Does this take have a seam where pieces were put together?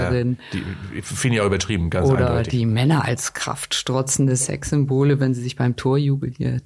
no; 0 cuts

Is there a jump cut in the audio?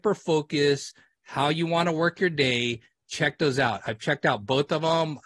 no; 0 cuts

